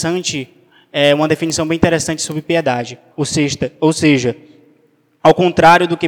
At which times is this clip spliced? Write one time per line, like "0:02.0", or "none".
0:03.1